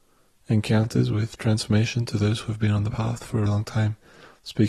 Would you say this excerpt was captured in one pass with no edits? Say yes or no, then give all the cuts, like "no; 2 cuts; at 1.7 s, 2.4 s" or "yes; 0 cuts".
no; 1 cut; at 3.5 s